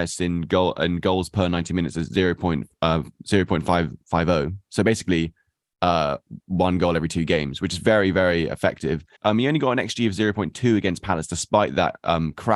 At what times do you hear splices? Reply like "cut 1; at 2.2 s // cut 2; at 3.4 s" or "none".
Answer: cut 1; at 9.2 s